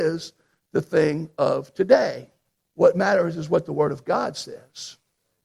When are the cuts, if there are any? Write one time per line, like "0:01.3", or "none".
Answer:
0:02.7